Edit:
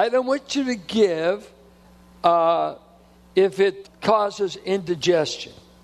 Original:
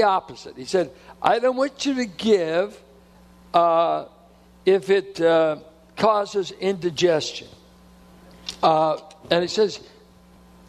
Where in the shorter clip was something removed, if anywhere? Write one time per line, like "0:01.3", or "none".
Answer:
0:03.8

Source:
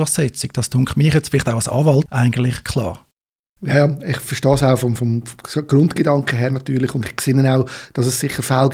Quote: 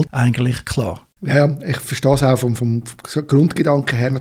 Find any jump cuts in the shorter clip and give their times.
0:01.2

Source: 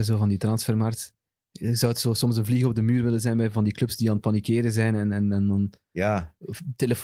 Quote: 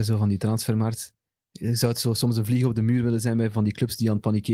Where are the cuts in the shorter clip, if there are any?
none

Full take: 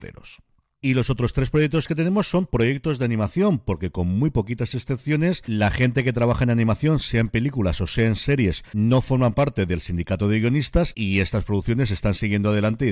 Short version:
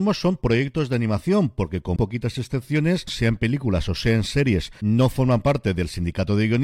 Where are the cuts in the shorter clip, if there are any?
0:02.0
0:03.1

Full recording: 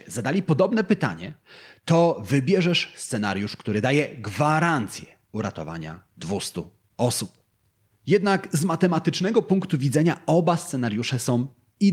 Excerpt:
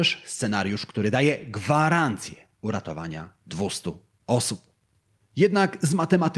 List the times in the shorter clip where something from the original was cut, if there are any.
none

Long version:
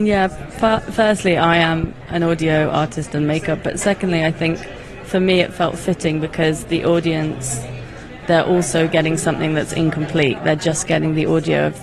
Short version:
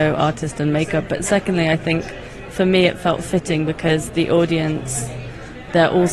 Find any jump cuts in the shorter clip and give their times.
none

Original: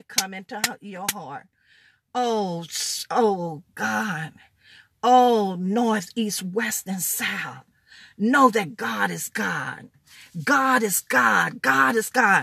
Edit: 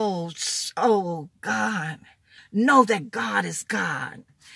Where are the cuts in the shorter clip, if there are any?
0:02.4

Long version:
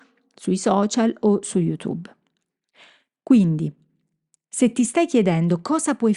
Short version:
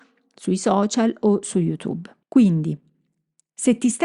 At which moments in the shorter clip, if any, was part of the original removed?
0:02.2

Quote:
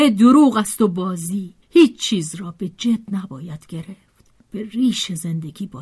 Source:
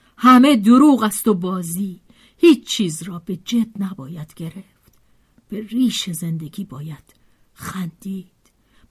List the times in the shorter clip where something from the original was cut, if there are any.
0:01.6
0:04.4

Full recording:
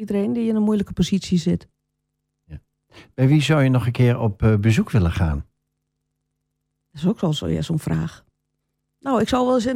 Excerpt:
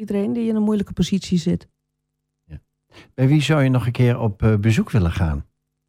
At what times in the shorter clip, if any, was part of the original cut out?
none

